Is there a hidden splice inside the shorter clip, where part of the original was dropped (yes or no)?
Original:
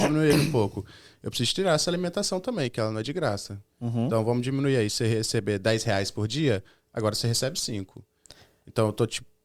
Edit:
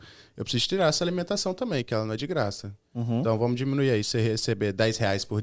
no